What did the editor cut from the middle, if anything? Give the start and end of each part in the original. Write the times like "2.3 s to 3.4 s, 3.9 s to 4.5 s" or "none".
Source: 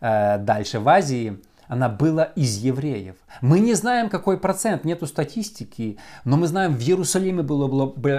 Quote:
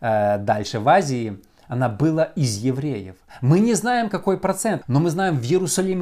4.8 s to 6.2 s